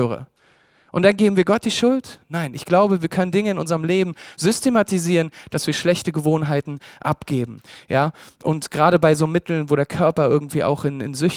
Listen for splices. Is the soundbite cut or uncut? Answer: uncut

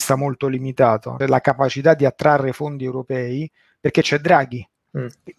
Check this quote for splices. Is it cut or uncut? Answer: cut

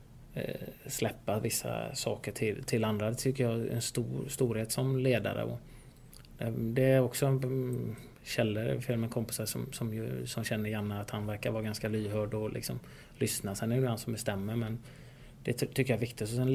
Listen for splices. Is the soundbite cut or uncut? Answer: uncut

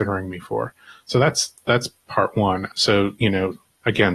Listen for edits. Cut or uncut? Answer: cut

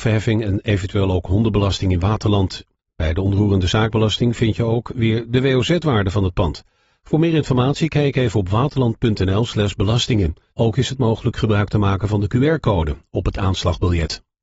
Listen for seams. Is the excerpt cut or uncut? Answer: cut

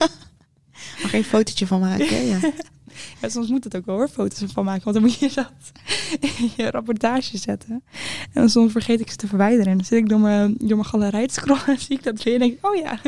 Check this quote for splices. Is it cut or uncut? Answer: uncut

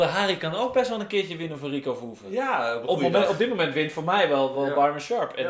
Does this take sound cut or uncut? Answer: cut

